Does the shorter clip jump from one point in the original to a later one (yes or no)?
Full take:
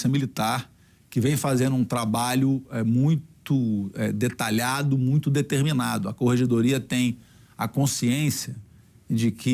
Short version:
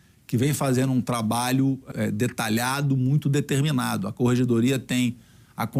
yes